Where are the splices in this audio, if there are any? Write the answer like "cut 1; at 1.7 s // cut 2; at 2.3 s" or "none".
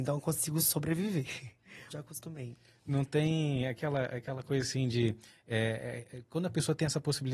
cut 1; at 1.9 s